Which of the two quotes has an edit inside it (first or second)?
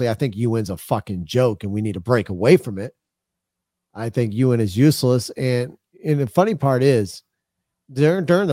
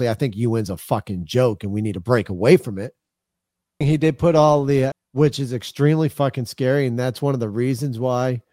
second